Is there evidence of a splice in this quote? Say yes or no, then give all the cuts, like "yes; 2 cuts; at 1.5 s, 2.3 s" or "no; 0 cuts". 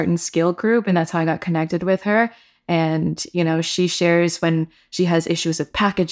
no; 0 cuts